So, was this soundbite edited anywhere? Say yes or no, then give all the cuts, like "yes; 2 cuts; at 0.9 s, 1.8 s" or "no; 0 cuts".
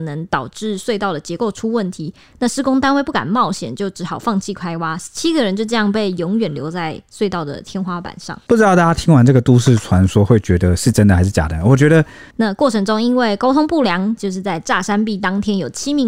yes; 2 cuts; at 12.3 s, 14.2 s